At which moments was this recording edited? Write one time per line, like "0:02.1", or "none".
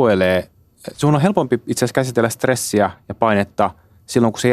0:00.9